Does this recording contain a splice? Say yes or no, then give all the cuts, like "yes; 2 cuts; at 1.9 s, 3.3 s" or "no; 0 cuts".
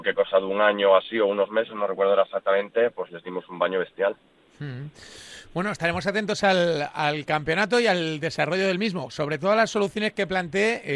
no; 0 cuts